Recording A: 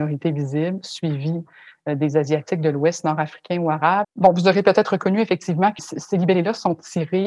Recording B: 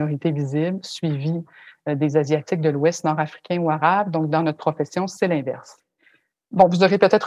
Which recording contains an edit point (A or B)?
A